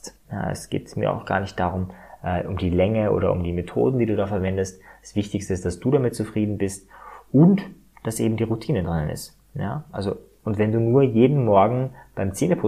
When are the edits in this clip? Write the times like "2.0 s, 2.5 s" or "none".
none